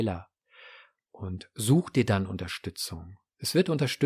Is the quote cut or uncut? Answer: uncut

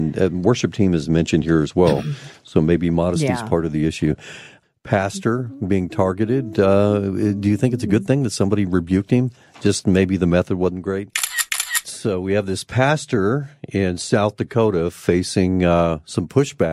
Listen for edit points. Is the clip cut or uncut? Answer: uncut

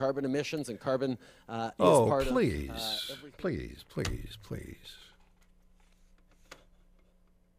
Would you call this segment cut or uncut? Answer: uncut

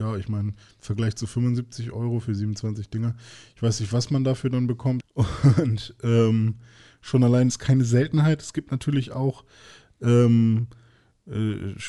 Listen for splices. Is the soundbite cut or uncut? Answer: cut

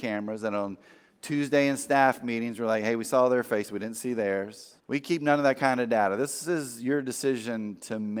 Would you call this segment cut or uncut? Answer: cut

